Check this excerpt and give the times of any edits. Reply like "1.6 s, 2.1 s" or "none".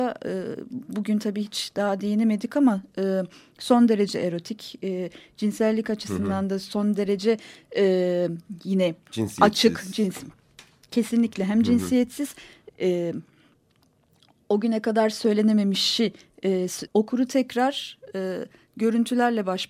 12.7 s, 16.9 s